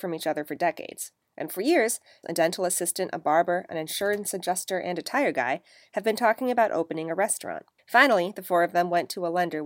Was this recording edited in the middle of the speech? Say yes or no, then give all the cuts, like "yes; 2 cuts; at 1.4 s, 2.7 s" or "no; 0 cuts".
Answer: yes; 2 cuts; at 2.2 s, 7.8 s